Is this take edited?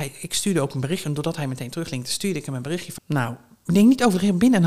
yes; 1 cut; at 3.0 s

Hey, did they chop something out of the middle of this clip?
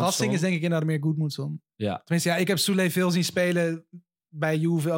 no; 0 cuts

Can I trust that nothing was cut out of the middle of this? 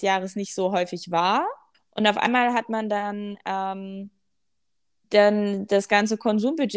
no; 2 cuts; at 1.7 s, 5.0 s

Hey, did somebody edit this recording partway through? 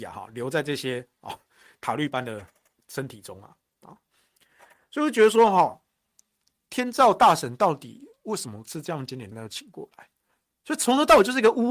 yes; 1 cut; at 9.3 s

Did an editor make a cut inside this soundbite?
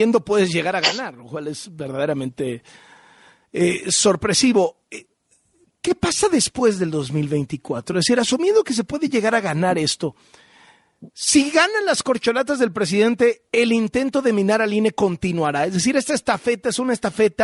no; 0 cuts

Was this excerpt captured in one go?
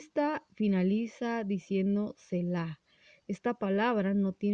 yes; 0 cuts

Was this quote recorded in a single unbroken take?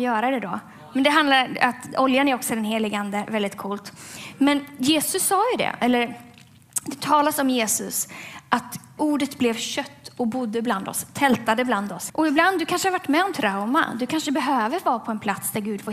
no; 2 cuts; at 9.0 s, 12.1 s

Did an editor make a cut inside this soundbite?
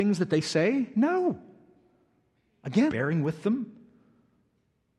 yes; 1 cut; at 2.9 s

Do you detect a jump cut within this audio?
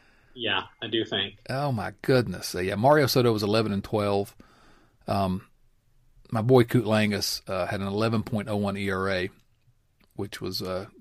no; 0 cuts

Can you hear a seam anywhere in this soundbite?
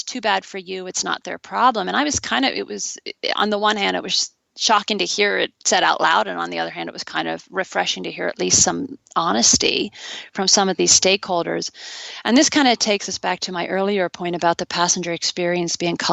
no; 0 cuts

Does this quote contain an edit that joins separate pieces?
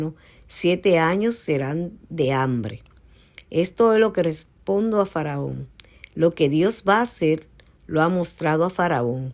no; 0 cuts

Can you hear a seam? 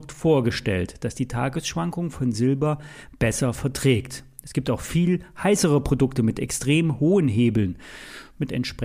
no; 0 cuts

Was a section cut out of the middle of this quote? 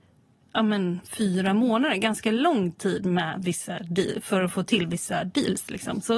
no; 0 cuts

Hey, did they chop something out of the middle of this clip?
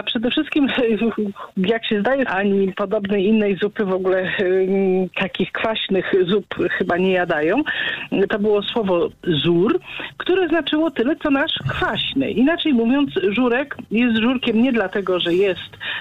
yes; 2 cuts; at 2.3 s, 8.3 s

